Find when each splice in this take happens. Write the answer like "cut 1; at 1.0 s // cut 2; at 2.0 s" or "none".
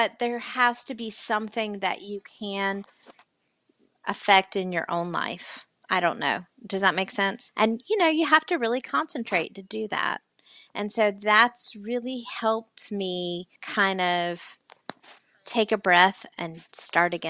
cut 1; at 7.5 s // cut 2; at 13.6 s

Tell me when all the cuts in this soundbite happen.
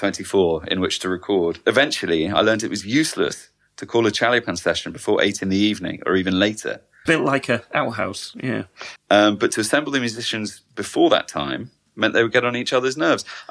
cut 1; at 7.1 s // cut 2; at 9.0 s

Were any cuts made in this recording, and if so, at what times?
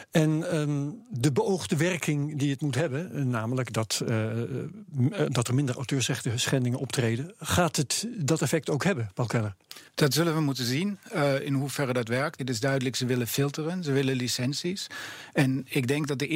cut 1; at 9.9 s // cut 2; at 12.4 s

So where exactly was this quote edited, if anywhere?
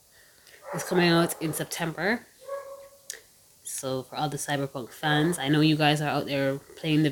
none

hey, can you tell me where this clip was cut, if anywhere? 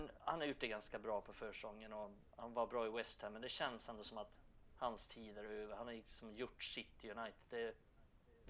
none

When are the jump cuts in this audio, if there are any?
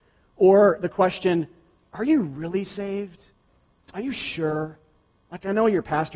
none

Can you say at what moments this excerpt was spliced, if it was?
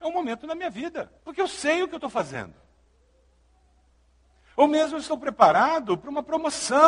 cut 1; at 1.2 s

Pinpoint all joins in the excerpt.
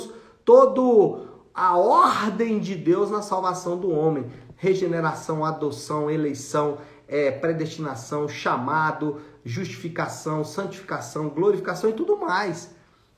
none

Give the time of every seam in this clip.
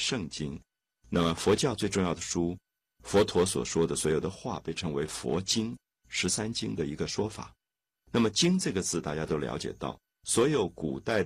cut 1; at 5.9 s // cut 2; at 8.0 s

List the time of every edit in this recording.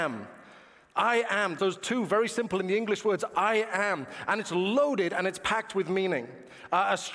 cut 1; at 1.6 s

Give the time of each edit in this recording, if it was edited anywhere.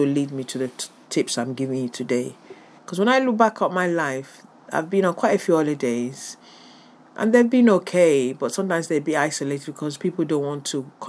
cut 1; at 2.8 s

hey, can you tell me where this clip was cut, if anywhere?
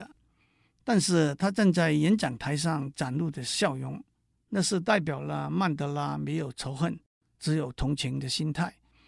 cut 1; at 4.3 s

